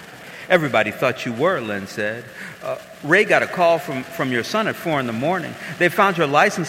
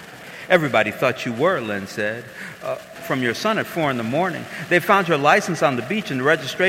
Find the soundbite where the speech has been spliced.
second; 1 cut; at 3.0 s

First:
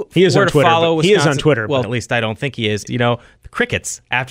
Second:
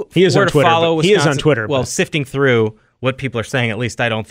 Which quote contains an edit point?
first; 2 cuts; at 1.8 s, 2.9 s

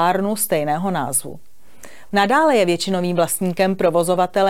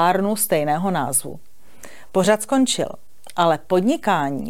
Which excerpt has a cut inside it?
first; 1 cut; at 2.1 s

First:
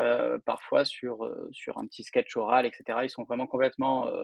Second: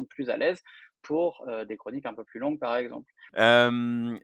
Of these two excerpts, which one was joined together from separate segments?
second; 1 cut; at 3.3 s

